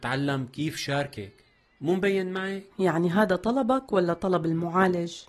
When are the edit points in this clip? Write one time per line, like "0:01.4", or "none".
0:02.7